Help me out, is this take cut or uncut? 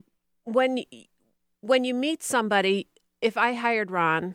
uncut